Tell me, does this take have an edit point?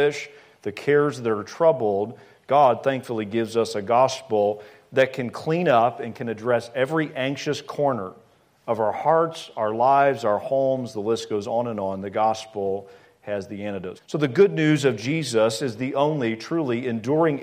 yes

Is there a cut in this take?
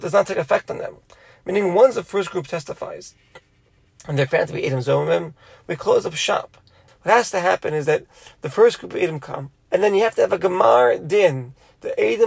yes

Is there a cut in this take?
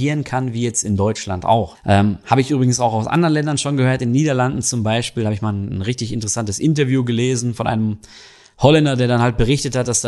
yes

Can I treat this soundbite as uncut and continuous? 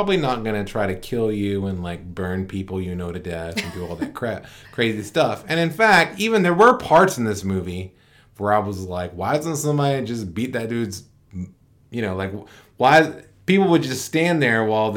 yes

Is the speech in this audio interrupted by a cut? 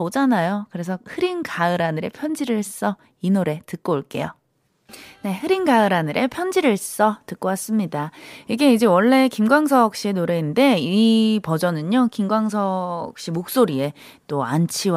no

